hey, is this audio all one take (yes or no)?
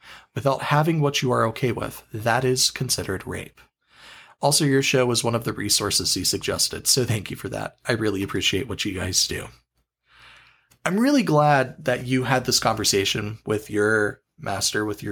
yes